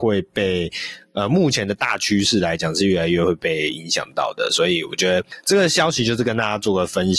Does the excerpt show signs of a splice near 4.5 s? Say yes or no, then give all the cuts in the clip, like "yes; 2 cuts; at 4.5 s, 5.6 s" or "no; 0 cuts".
no; 0 cuts